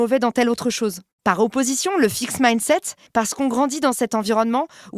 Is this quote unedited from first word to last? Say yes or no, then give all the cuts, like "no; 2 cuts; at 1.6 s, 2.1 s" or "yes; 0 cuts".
no; 2 cuts; at 1.1 s, 3.1 s